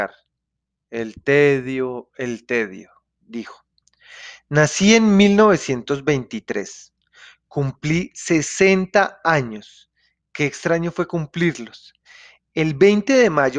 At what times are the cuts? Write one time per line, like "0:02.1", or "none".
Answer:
none